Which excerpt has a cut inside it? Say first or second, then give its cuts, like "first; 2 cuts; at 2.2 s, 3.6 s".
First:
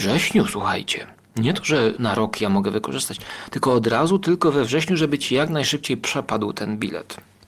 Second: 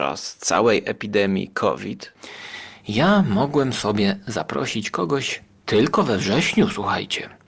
first; 1 cut; at 2.0 s